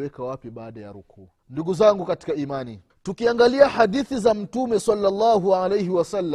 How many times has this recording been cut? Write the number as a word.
two